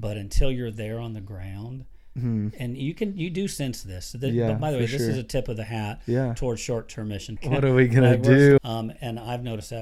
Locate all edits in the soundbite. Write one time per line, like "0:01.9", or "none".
0:07.4
0:08.6